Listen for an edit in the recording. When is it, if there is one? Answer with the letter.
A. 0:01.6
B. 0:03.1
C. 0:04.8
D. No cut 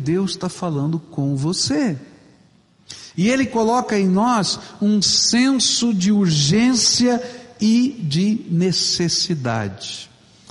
B